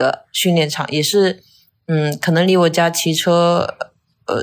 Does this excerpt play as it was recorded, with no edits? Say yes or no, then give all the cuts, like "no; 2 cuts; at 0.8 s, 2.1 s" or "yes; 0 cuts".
yes; 0 cuts